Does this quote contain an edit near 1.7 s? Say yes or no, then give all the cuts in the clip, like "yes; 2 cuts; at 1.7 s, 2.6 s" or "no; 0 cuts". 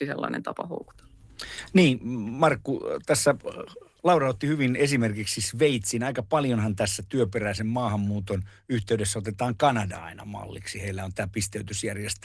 no; 0 cuts